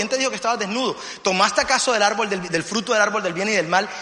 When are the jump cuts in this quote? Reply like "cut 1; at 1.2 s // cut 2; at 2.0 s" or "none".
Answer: cut 1; at 2.5 s